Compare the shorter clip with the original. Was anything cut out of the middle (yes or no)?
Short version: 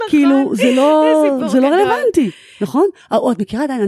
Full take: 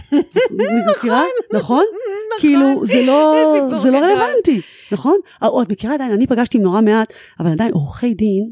no